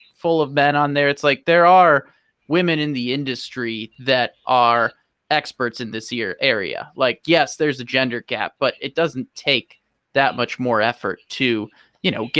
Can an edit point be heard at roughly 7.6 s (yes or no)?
no